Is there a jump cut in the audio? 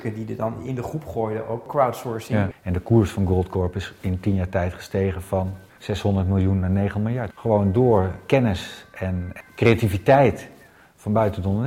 yes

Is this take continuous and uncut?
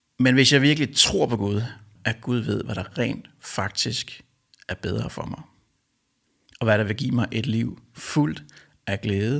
no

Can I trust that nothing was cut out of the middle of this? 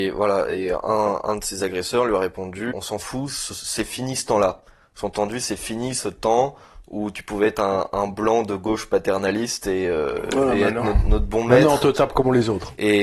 no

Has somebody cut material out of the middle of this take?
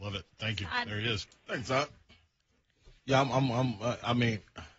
yes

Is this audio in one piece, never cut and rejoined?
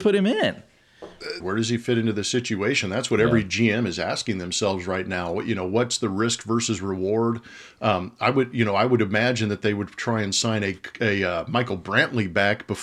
no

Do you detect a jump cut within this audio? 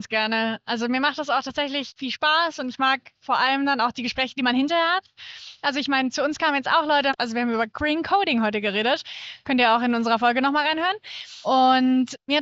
no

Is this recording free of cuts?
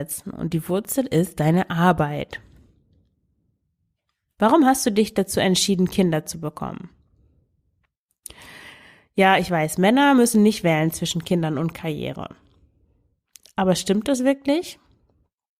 yes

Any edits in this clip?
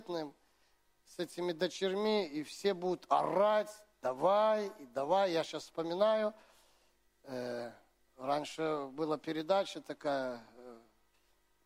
no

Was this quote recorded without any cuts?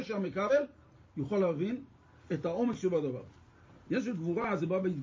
no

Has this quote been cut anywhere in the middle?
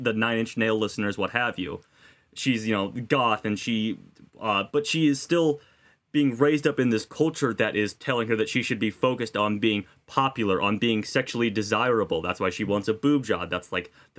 no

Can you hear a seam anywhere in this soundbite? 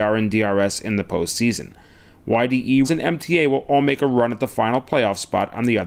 yes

